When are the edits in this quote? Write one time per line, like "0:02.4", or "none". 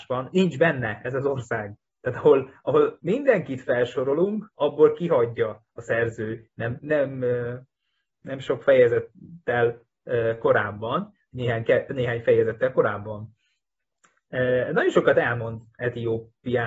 0:06.8